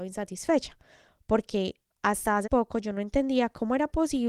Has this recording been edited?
yes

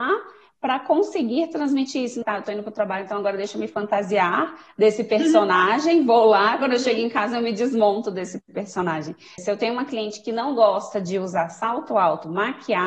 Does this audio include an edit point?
yes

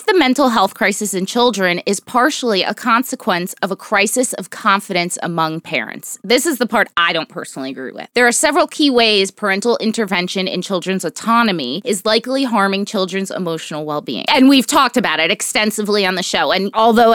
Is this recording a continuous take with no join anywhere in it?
no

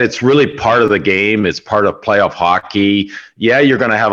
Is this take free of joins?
yes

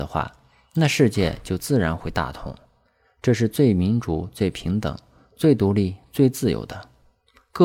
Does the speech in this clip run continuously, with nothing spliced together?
yes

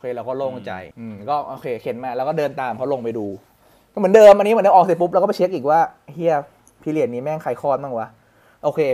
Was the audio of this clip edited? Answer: yes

